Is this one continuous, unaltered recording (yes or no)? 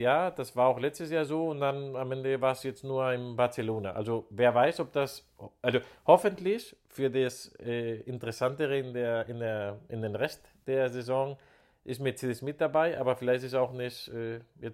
yes